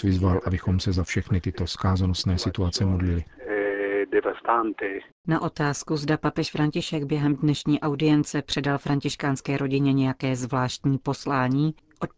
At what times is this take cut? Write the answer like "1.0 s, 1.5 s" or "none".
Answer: none